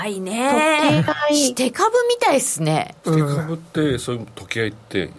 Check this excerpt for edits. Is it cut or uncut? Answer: cut